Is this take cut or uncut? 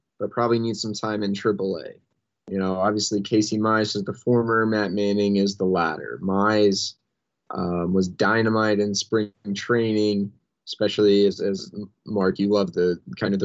uncut